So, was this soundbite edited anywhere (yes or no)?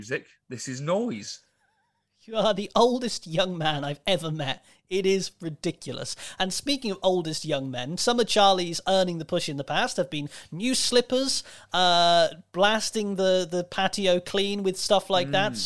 no